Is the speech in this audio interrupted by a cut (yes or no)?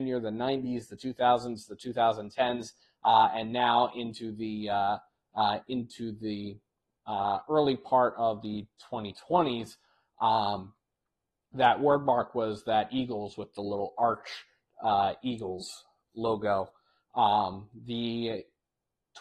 no